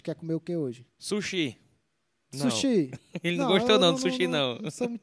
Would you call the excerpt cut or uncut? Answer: cut